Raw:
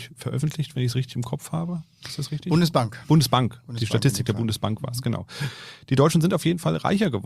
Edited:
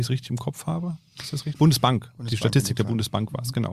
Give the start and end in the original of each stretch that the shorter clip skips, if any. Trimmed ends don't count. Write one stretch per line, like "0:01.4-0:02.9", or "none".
0:02.4-0:03.0